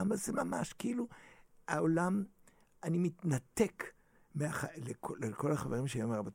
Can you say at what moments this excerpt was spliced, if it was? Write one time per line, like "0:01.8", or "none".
none